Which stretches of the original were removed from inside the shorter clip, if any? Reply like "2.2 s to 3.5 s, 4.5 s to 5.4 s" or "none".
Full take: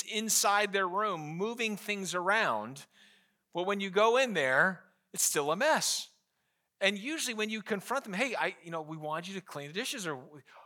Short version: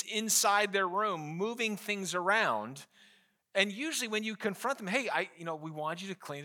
3.4 s to 6.6 s